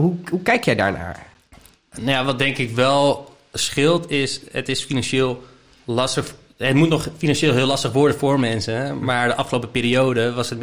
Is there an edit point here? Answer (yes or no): no